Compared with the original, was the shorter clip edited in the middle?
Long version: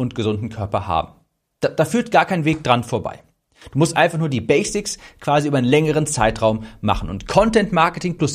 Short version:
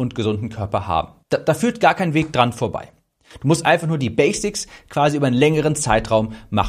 yes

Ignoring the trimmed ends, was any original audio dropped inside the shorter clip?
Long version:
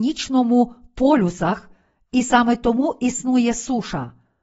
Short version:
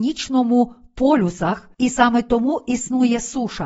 yes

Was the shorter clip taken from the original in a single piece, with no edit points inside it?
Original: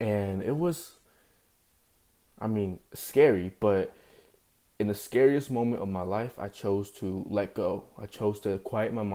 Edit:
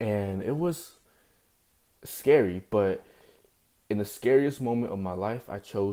no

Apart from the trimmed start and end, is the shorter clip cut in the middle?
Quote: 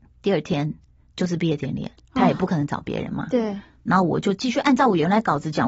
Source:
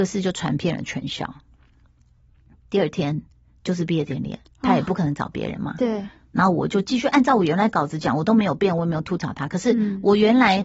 no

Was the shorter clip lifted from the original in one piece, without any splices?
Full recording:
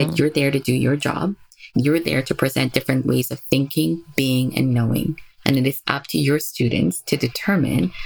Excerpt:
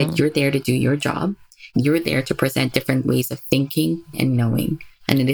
no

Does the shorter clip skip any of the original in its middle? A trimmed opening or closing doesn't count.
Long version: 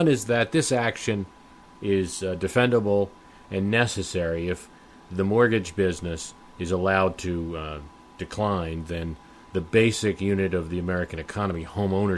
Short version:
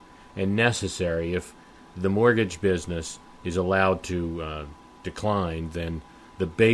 no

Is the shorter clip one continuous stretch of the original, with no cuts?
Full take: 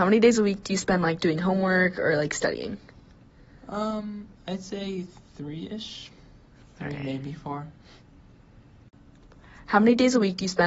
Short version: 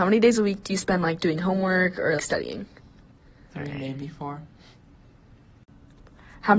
no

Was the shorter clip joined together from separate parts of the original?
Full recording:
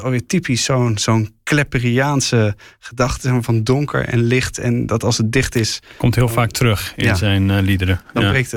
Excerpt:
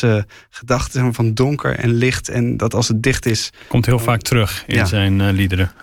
no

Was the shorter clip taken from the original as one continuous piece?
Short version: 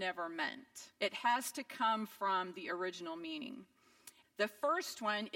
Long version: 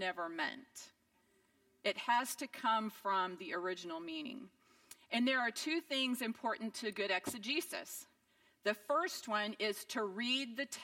no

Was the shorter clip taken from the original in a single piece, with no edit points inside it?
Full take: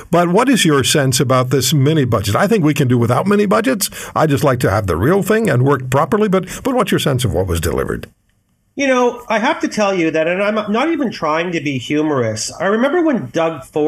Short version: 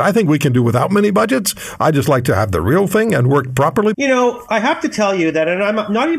no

